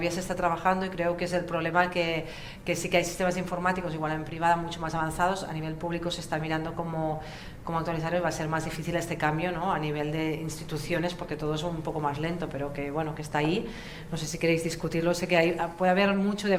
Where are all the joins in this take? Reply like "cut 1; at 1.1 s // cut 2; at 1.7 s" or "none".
none